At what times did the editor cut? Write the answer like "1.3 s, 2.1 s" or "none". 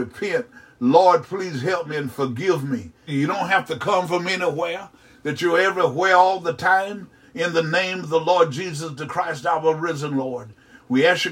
3.1 s, 7.2 s